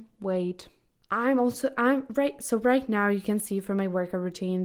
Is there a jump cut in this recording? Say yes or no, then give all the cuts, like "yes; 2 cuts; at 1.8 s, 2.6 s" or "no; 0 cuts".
no; 0 cuts